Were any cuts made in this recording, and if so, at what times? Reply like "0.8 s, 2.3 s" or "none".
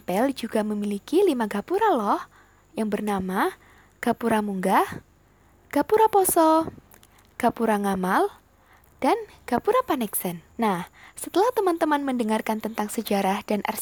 8.8 s, 10.5 s